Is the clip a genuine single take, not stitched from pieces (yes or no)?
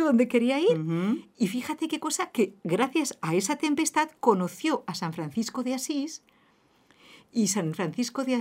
yes